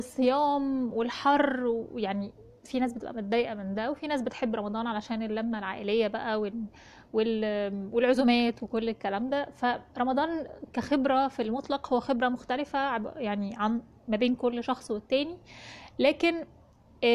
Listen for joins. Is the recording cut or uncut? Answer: uncut